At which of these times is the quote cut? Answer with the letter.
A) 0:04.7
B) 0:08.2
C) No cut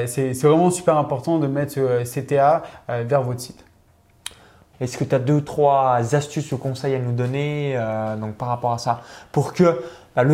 A